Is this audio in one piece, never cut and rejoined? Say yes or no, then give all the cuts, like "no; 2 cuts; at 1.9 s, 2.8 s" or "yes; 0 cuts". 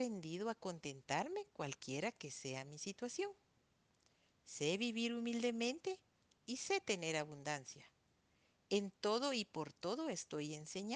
yes; 0 cuts